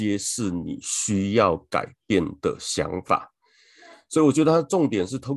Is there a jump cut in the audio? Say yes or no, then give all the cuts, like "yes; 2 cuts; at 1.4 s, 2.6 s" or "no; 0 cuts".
no; 0 cuts